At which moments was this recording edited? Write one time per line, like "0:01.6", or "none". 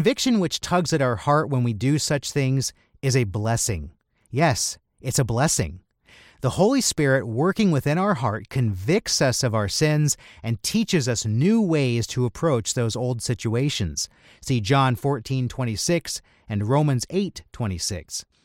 none

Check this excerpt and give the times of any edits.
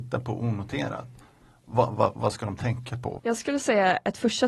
0:03.2

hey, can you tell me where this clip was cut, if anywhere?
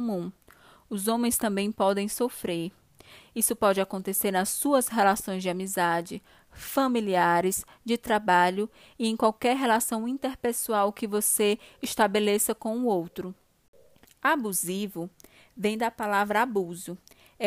0:03.2
0:14.1

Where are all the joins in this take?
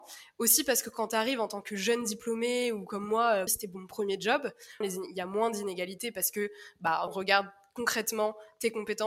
0:03.5
0:04.8
0:07.1

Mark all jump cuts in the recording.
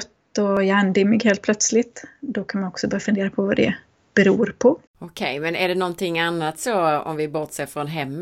0:04.9

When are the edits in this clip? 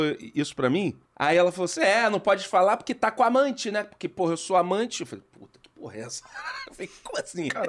0:01.1

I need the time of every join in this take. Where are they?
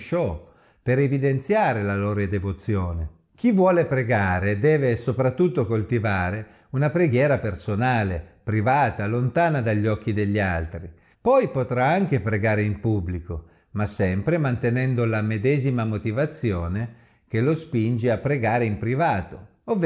0:11.1

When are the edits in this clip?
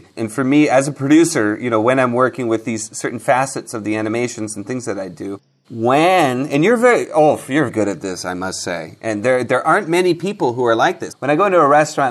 0:07.7
0:11.1

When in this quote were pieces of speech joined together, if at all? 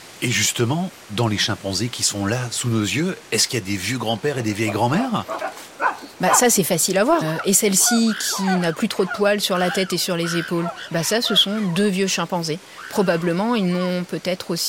0:07.2

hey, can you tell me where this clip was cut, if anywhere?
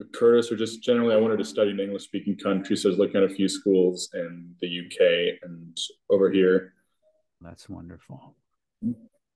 0:07.4

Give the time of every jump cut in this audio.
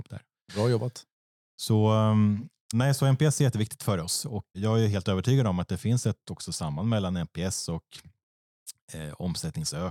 0:02.7
0:04.5

